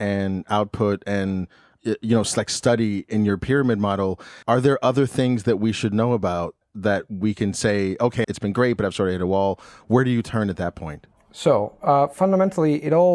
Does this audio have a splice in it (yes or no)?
yes